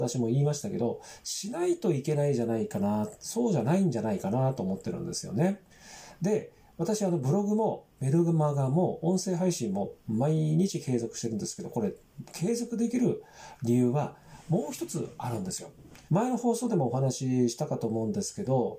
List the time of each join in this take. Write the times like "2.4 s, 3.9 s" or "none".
16.1 s